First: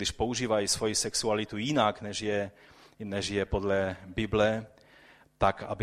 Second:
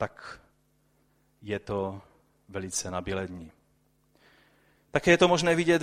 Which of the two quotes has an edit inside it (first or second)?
second